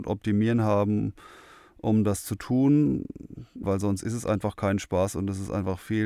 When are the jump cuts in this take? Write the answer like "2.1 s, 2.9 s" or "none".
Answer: 3.6 s

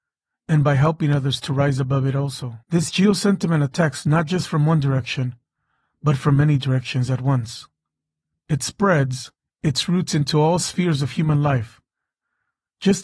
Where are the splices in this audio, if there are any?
2.6 s

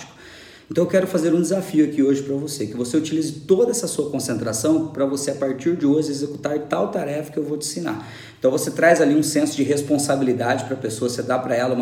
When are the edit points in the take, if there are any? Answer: none

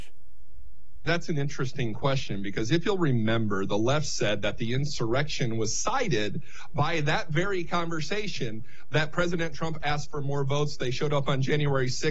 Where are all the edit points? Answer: 1.1 s

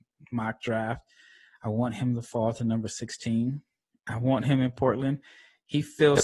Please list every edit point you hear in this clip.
none

